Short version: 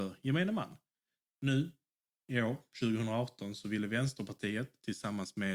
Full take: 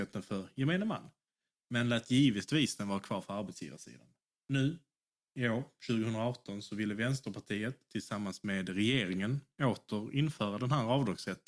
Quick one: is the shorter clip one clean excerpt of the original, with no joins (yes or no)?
no